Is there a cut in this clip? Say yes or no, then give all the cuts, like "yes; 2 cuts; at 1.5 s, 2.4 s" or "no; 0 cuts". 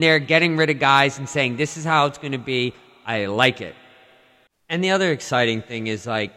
no; 0 cuts